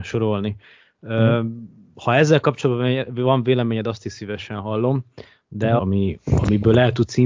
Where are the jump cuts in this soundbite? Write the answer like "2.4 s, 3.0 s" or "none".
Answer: 5.8 s